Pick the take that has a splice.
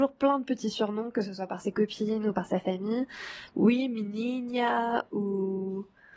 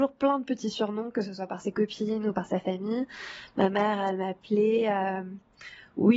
first; 1 cut; at 3.5 s

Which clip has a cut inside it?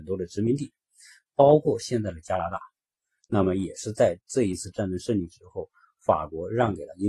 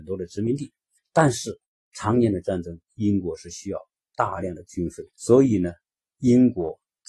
second; 2 cuts; at 1.0 s, 5.1 s

